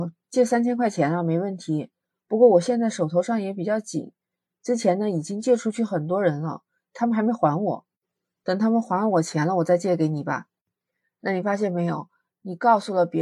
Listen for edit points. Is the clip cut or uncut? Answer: uncut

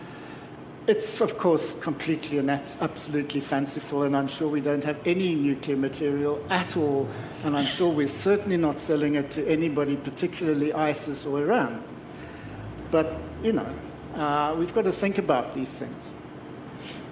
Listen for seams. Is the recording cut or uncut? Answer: uncut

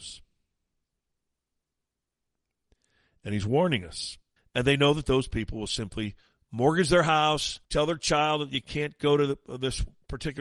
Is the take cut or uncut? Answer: cut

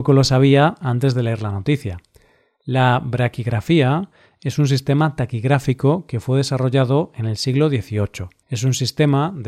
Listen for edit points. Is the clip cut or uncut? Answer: cut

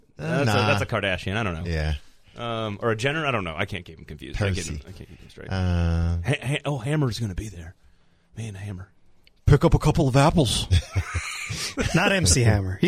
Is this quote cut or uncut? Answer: uncut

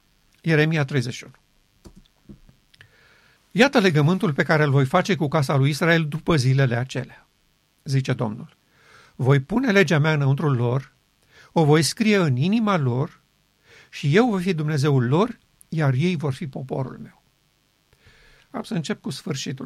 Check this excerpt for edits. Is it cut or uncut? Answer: cut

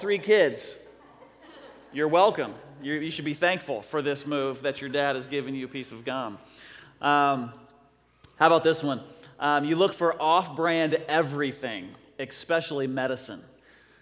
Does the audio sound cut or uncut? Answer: uncut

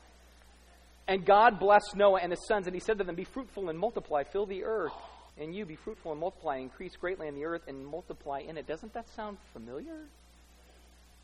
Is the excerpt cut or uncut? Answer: cut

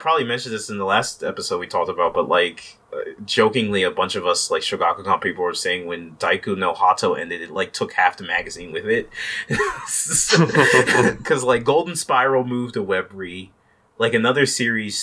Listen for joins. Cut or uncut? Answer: uncut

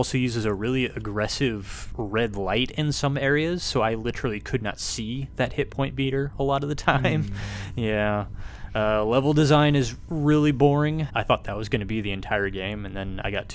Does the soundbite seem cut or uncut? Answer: cut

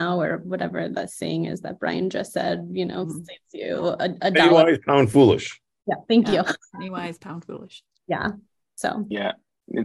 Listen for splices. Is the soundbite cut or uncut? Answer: uncut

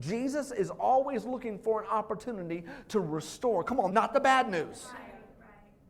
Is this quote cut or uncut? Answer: cut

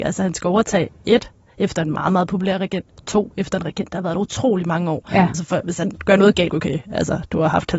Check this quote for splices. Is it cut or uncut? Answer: cut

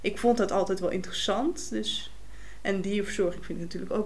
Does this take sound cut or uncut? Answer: uncut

